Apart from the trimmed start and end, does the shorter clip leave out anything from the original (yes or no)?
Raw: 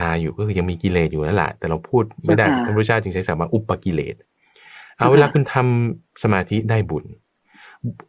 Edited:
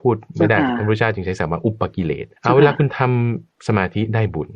yes